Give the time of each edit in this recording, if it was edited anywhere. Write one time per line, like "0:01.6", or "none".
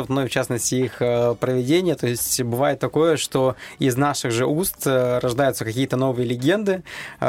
none